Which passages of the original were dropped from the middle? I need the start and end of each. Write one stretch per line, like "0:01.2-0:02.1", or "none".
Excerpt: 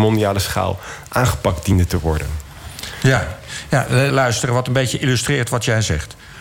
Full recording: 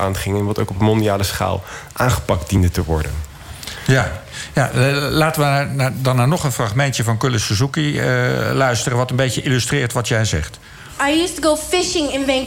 0:04.9-0:08.5

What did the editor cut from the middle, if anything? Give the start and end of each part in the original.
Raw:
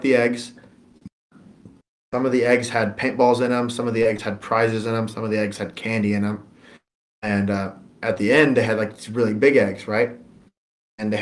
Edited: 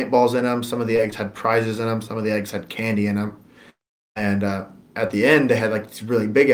none

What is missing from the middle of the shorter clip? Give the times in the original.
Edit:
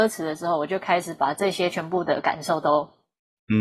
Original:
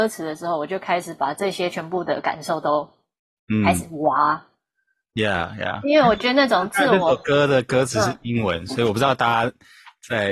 none

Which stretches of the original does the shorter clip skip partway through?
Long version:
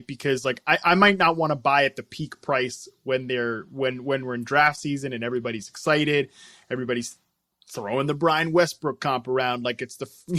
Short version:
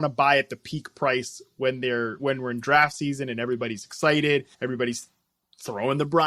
0:03.7-0:04.0
0:06.4-0:06.6

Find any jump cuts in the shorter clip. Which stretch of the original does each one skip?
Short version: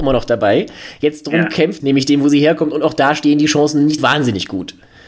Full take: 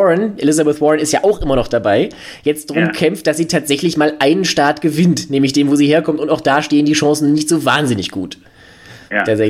0:03.2-0:05.3
0:07.5-0:07.6

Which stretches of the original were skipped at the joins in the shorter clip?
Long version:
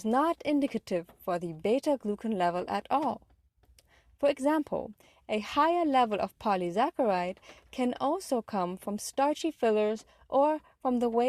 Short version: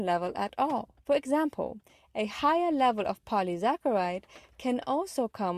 0:03.3-0:04.1

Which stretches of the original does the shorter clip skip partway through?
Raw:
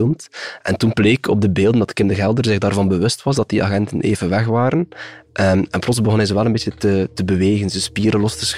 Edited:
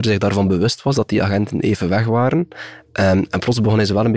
none

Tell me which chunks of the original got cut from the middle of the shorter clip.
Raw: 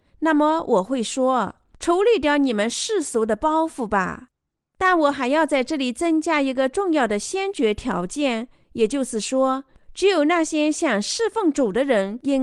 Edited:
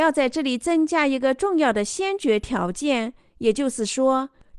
none

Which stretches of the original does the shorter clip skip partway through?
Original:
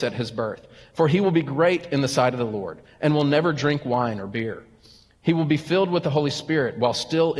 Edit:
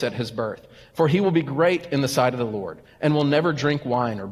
none

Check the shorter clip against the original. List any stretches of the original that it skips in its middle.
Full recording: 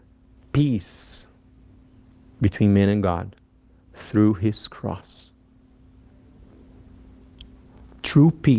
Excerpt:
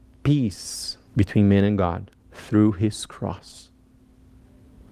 0:01.4-0:02.3
0:03.4-0:03.8

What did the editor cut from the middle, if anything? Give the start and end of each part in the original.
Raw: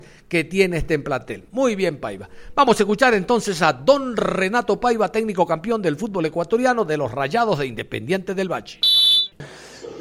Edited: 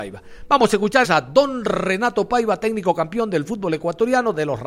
0:03.1-0:03.6

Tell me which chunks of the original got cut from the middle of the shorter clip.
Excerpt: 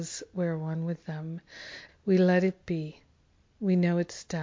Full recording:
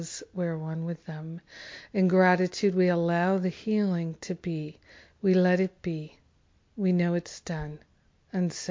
0:01.9-0:05.0

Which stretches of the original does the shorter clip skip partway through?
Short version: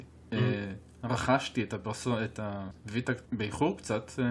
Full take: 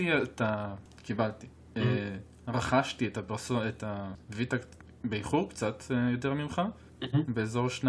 0:04.7-0:05.0

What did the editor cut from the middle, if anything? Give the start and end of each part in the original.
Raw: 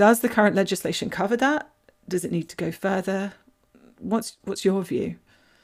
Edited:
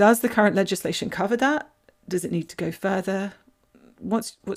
none

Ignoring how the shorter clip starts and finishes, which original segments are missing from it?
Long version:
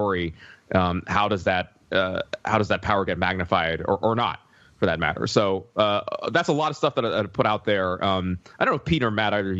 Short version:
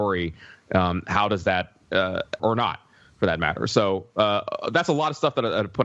0:02.4-0:04.0

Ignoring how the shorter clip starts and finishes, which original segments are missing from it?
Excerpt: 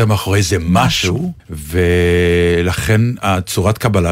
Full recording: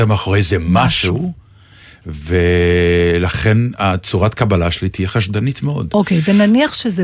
0:01.4-0:02.0

